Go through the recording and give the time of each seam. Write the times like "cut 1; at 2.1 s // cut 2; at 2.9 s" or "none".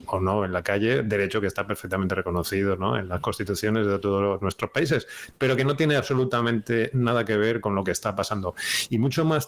none